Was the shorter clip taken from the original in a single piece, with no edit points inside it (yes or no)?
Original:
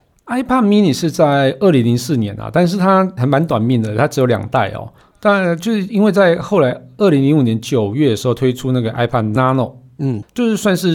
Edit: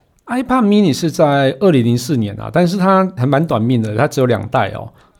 yes